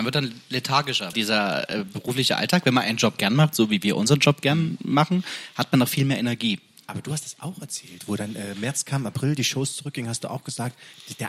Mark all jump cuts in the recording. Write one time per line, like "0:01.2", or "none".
0:01.1